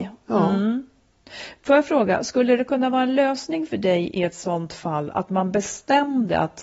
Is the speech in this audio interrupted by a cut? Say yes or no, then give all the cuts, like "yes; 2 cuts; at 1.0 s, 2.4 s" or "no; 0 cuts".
no; 0 cuts